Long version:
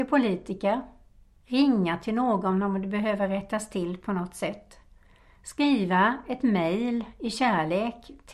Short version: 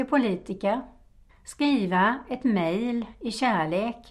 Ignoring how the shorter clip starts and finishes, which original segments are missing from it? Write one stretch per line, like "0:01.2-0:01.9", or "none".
0:01.3-0:05.3